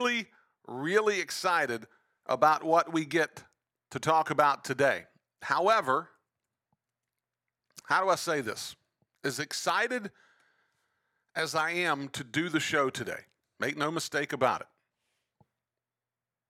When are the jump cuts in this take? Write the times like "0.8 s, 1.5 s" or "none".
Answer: 7.8 s, 13.4 s